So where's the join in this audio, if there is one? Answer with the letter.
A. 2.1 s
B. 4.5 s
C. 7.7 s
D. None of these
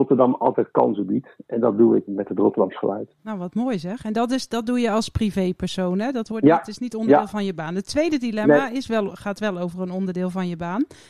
A